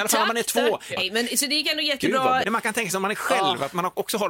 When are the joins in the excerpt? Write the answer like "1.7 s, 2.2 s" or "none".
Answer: 1.0 s, 2.4 s